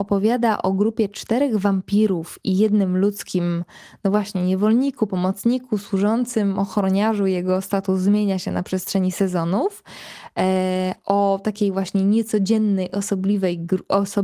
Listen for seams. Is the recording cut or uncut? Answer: uncut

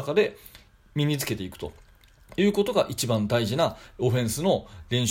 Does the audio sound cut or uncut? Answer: uncut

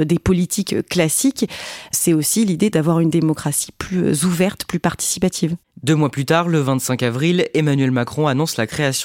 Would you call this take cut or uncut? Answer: uncut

